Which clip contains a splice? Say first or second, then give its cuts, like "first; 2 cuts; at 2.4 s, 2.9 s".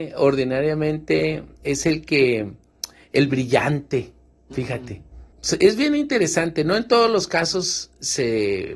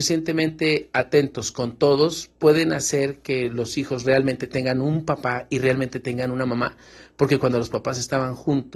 first; 1 cut; at 5.3 s